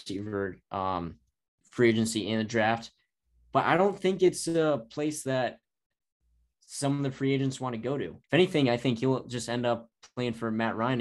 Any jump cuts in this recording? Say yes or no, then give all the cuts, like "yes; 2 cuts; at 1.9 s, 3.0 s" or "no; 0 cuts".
yes; 2 cuts; at 1.6 s, 8.2 s